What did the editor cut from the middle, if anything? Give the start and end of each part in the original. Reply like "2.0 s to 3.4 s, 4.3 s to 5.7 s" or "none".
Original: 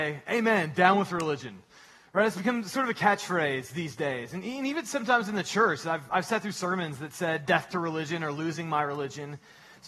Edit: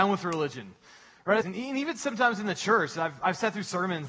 2.3 s to 4.3 s